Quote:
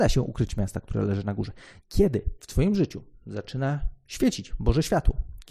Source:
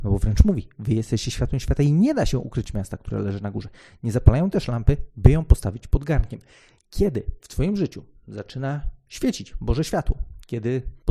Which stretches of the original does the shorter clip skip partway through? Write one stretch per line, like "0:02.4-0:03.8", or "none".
0:04.0-0:06.8